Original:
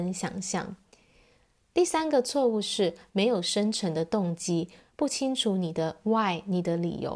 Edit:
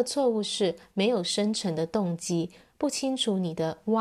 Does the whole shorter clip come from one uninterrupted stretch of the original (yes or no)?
yes